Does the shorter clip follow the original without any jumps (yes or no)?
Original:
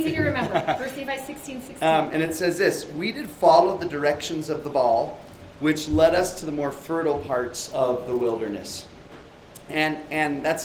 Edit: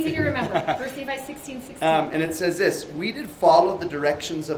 yes